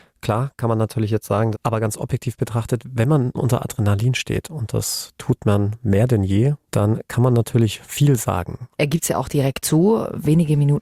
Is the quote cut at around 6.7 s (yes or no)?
yes